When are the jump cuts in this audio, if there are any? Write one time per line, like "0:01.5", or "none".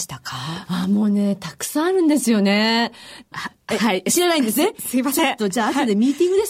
0:03.3